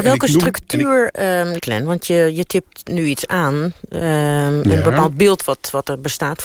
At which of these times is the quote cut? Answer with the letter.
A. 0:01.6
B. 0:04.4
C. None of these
A